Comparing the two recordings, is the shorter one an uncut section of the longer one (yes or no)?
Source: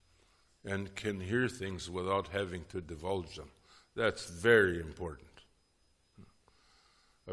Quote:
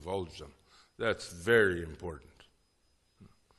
yes